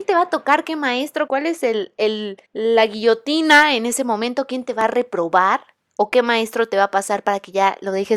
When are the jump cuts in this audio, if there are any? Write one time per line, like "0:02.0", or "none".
0:02.5